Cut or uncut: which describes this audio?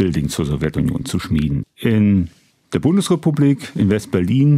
uncut